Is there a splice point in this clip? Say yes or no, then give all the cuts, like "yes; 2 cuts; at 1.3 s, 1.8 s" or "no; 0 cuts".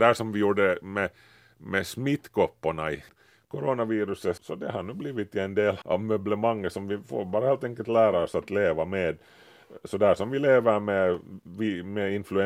yes; 2 cuts; at 4.4 s, 5.8 s